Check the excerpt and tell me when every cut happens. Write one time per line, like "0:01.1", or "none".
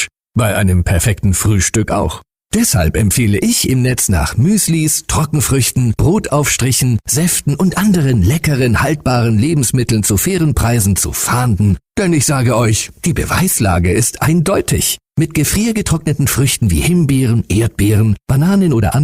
0:06.0
0:11.8

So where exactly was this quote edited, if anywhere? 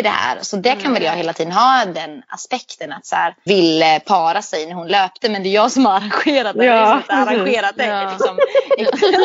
0:03.5

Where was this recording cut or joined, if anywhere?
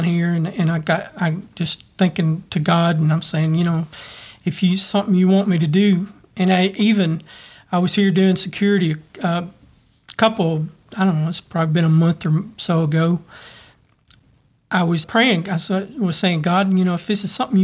0:15.0

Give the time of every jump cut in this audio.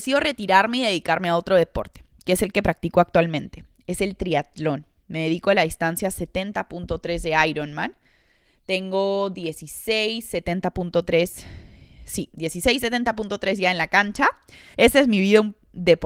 0:14.7

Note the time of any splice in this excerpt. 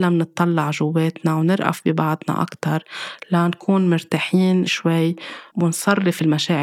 0:04.7

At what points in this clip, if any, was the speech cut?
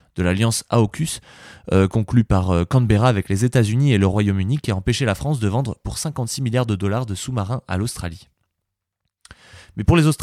none

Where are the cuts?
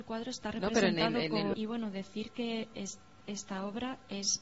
0:01.5

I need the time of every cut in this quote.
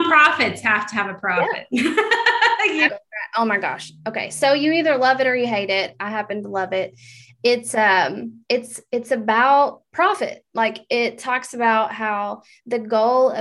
0:02.9

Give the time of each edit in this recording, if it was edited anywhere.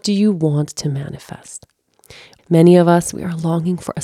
0:02.4

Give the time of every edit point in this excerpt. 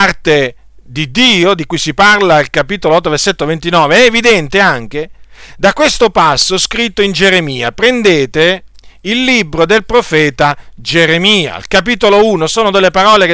none

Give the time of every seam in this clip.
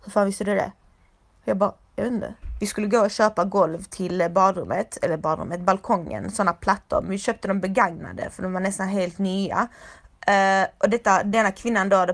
0:02.6

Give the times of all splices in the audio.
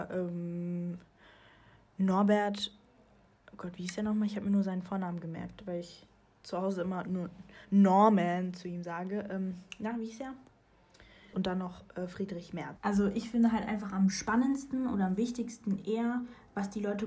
0:11.3
0:12.8

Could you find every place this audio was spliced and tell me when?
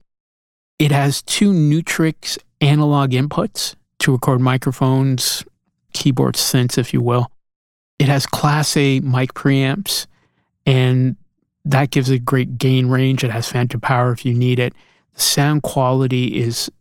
0:05.9

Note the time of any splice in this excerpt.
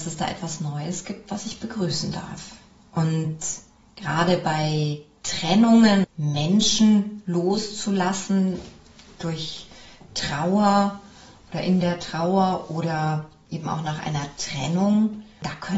0:06.0

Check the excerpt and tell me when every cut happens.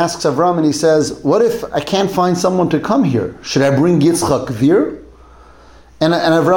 none

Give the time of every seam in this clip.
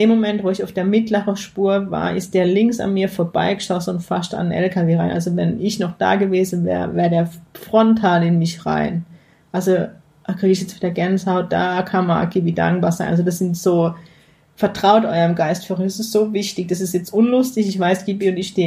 none

